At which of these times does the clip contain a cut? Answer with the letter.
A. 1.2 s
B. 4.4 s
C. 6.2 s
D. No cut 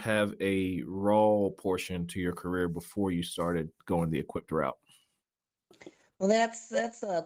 D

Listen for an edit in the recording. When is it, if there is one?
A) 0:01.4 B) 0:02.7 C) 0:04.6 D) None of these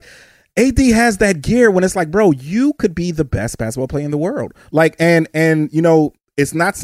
D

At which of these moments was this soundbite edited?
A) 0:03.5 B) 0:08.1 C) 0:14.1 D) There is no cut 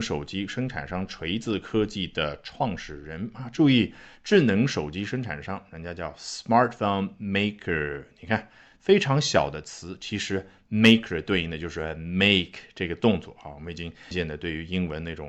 C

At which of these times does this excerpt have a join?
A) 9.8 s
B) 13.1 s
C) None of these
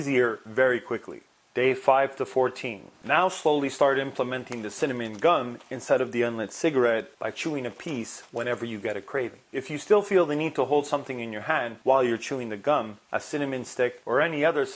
B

